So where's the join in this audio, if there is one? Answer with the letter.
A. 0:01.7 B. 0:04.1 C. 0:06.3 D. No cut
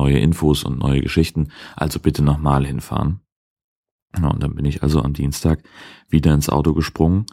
D